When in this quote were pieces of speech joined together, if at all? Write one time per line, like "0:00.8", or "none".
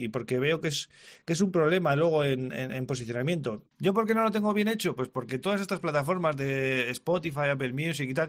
none